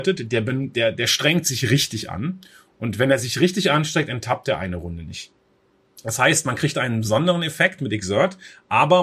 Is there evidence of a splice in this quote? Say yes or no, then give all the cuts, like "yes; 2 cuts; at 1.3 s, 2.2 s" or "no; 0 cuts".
no; 0 cuts